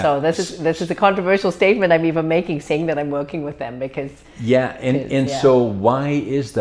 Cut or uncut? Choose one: uncut